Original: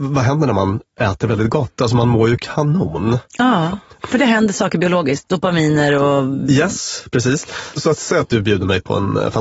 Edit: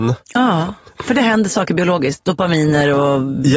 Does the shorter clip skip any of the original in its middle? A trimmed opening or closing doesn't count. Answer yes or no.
no